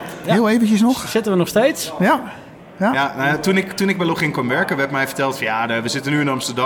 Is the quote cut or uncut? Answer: uncut